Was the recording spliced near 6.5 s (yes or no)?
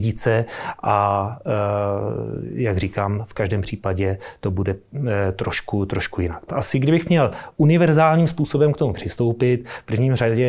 yes